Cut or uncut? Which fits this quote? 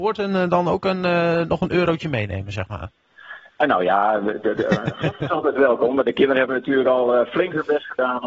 uncut